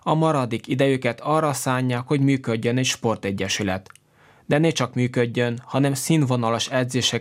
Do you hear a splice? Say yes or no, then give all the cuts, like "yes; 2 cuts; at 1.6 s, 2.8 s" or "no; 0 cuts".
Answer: no; 0 cuts